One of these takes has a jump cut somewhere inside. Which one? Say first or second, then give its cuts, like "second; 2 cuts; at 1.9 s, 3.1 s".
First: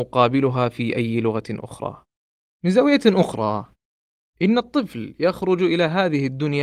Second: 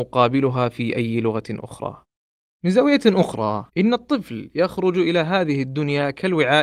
second; 1 cut; at 3.7 s